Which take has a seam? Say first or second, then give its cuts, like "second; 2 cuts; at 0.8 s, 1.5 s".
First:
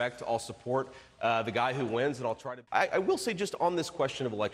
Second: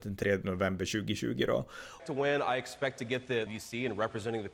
second; 2 cuts; at 2.0 s, 3.5 s